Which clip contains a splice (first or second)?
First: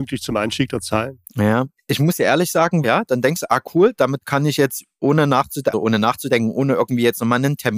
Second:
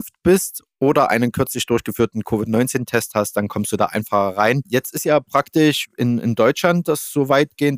first